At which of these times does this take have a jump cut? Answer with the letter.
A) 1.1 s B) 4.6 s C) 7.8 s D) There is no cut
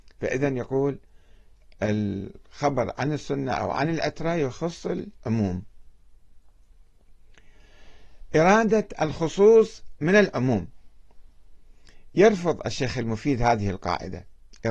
D